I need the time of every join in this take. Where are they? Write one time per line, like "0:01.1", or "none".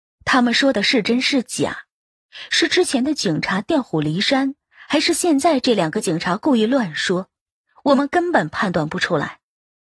none